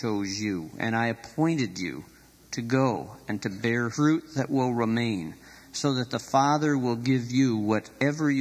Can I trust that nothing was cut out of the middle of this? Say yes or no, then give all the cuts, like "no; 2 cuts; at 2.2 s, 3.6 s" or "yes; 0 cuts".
no; 1 cut; at 3.9 s